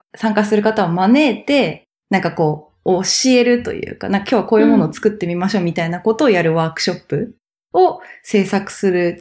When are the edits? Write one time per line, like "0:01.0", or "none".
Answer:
none